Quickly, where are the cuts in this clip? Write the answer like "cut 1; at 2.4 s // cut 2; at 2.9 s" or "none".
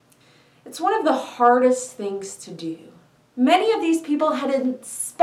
cut 1; at 3.2 s